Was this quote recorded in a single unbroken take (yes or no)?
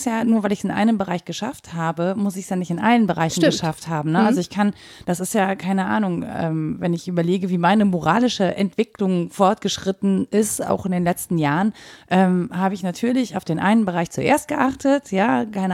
yes